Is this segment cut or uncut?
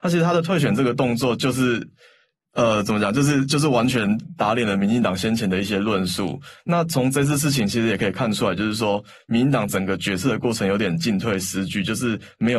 uncut